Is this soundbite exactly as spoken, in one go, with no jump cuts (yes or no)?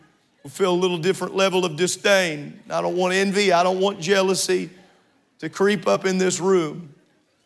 yes